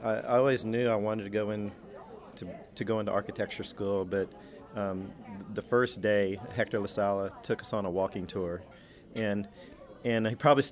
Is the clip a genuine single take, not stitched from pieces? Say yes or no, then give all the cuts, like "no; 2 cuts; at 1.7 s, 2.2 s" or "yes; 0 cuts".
yes; 0 cuts